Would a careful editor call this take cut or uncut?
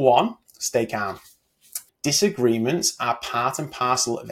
cut